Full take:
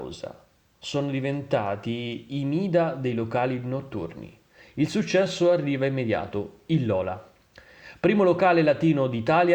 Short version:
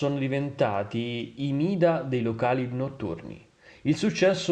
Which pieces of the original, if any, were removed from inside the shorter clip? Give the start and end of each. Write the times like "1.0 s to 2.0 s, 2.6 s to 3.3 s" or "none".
none